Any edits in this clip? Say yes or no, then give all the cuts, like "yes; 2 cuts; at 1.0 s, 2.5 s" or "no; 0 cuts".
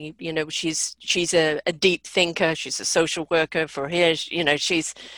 no; 0 cuts